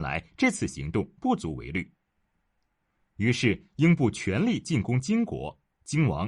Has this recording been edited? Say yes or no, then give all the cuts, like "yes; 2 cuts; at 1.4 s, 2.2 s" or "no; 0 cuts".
no; 0 cuts